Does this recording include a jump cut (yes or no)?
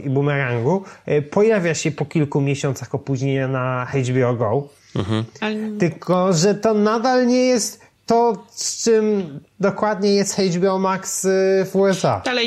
no